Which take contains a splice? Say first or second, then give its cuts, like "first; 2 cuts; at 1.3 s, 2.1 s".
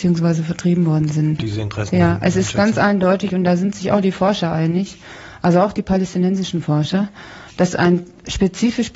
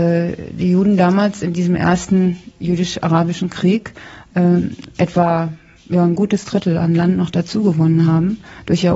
first; 1 cut; at 1.4 s